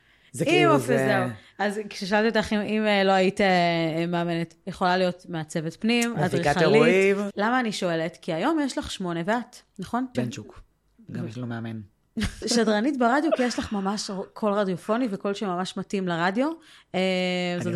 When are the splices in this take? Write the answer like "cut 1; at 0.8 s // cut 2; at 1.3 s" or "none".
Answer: cut 1; at 7.3 s // cut 2; at 10.1 s // cut 3; at 12.4 s